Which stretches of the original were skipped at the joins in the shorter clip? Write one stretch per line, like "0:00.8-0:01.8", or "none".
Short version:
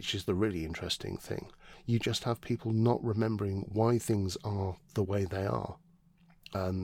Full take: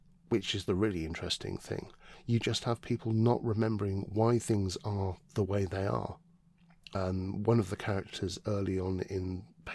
none